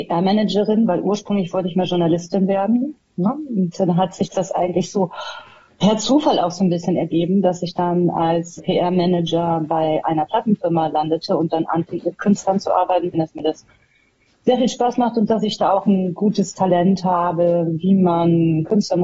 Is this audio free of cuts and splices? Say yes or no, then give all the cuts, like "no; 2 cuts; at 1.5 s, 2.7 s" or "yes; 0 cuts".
no; 2 cuts; at 8.6 s, 13.1 s